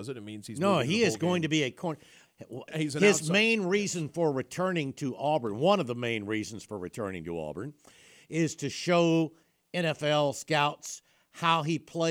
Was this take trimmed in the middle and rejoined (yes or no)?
yes